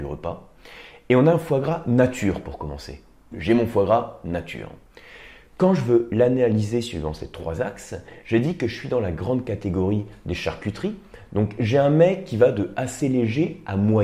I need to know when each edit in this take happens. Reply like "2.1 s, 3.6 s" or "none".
3.3 s